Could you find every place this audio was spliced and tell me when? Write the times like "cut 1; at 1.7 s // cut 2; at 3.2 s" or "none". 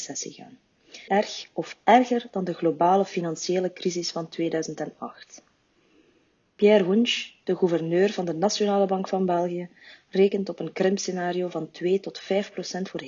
cut 1; at 1.1 s

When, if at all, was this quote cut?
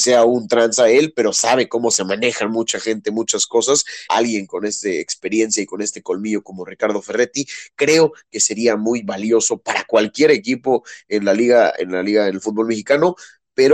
cut 1; at 4.1 s

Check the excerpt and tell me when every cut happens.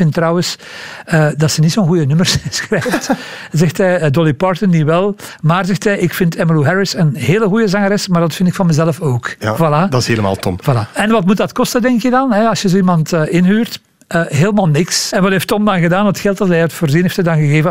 cut 1; at 15.1 s

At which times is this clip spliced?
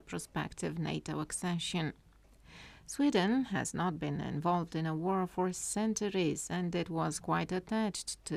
none

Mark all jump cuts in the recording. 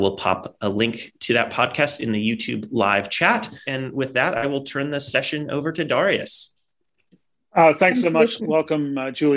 cut 1; at 3.6 s // cut 2; at 8.4 s

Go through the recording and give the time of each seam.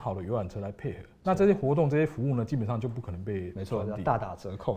cut 1; at 1.2 s

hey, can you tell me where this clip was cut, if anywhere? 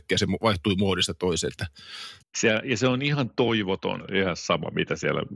cut 1; at 2.2 s // cut 2; at 4.0 s

